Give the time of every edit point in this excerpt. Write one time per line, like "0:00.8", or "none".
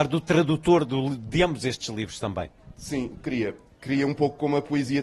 none